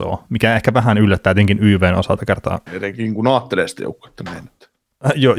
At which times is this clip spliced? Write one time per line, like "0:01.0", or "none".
0:02.7